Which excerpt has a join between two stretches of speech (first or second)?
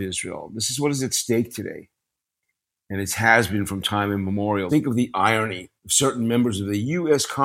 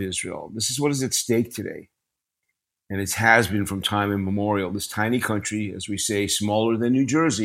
first